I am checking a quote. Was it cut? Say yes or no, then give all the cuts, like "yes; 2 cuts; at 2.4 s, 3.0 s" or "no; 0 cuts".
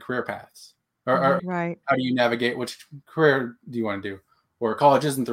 yes; 1 cut; at 1.4 s